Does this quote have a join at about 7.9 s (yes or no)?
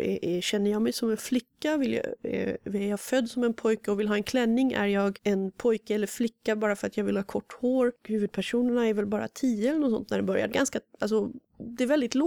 yes